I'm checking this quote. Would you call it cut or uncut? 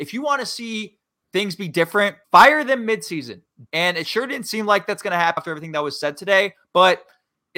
cut